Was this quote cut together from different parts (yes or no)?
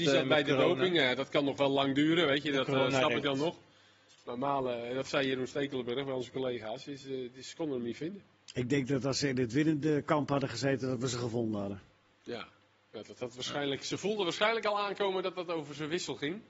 no